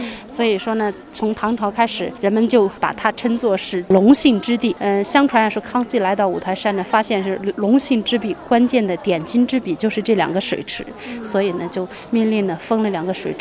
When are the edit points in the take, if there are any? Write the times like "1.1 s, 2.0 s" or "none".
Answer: none